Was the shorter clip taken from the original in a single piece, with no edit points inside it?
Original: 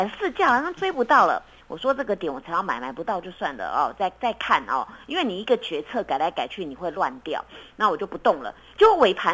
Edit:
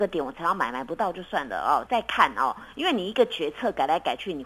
no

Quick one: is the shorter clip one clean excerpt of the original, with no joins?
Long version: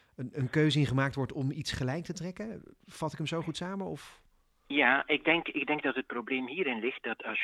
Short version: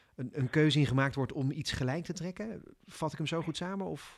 yes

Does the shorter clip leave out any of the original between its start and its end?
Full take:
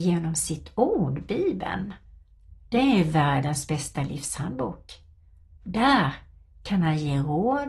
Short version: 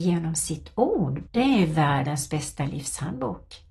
yes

